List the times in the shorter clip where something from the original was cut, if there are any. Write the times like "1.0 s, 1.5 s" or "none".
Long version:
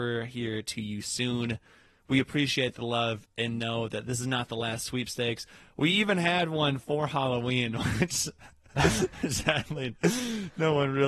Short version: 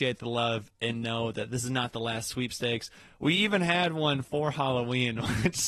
none